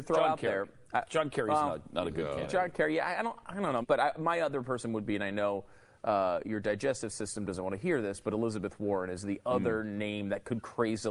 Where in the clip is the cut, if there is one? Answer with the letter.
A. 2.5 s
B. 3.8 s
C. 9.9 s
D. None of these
B